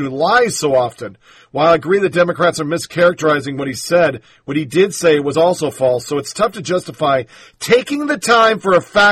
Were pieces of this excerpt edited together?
no; 0 cuts

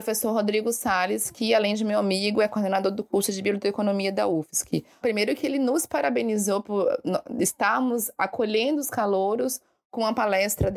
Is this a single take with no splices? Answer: no; 2 cuts; at 5.0 s, 6.6 s

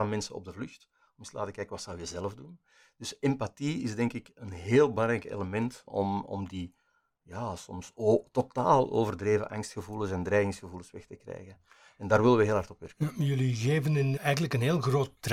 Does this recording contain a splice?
yes; 2 cuts; at 5.9 s, 14.2 s

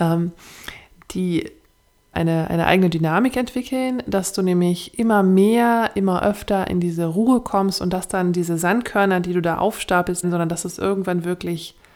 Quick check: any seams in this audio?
yes; 2 cuts; at 2.1 s, 10.2 s

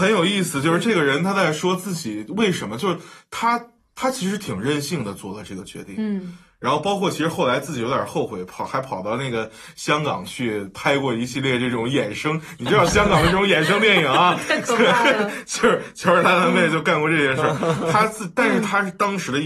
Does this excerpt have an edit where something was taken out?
no; 0 cuts

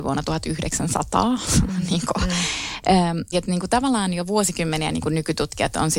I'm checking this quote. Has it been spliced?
yes; 1 cut; at 3.3 s

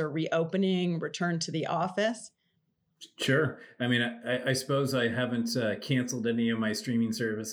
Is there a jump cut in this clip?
no; 0 cuts

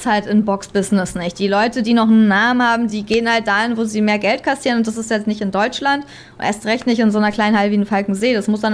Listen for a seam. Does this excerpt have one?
no; 0 cuts

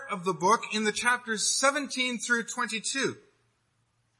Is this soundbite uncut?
yes; 0 cuts

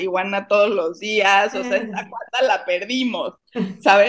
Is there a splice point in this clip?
no; 0 cuts

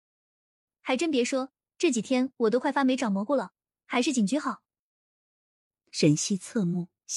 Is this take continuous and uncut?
yes; 0 cuts

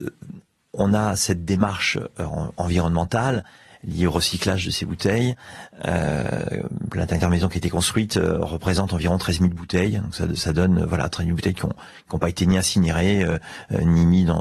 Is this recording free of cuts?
yes; 0 cuts

